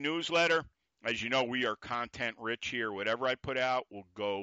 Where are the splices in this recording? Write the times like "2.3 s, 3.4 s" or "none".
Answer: none

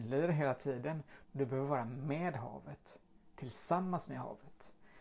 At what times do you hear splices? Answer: 1.2 s

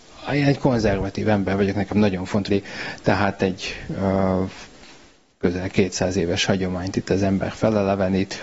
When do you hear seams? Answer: 2.5 s

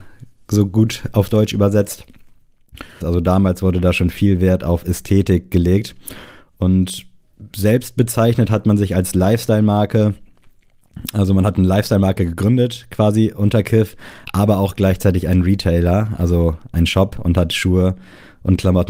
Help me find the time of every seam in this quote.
3.0 s

